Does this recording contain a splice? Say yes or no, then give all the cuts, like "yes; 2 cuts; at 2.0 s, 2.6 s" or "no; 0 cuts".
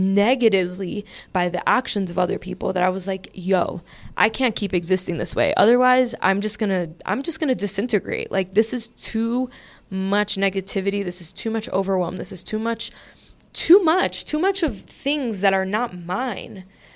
no; 0 cuts